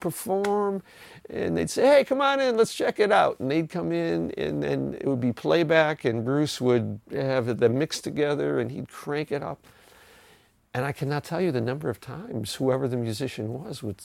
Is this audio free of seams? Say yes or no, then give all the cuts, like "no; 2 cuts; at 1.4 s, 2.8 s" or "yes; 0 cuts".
yes; 0 cuts